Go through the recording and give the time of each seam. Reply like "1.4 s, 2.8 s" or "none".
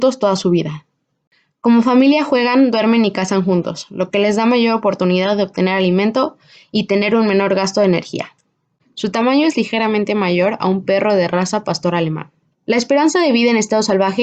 8.8 s, 12.5 s